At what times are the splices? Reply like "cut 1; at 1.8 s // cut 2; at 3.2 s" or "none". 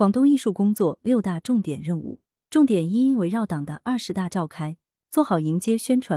none